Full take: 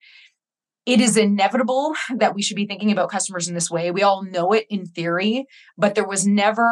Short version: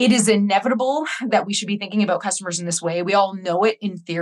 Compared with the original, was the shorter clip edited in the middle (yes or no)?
no